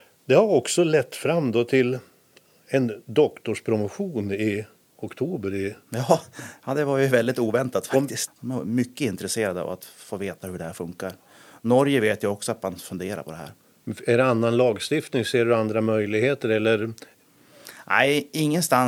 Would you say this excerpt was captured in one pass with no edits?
no; 1 cut; at 8.3 s

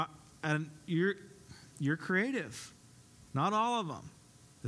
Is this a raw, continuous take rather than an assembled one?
no; 1 cut; at 3.3 s

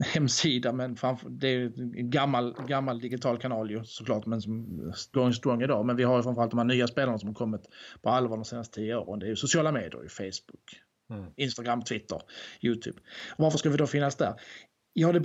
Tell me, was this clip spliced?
yes; 1 cut; at 5.1 s

